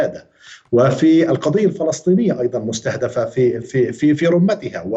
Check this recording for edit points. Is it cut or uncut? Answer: cut